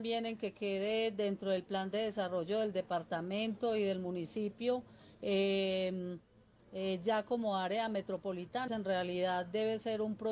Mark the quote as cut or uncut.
cut